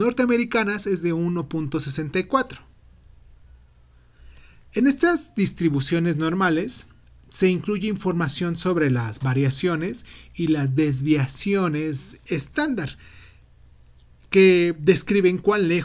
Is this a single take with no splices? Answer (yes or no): yes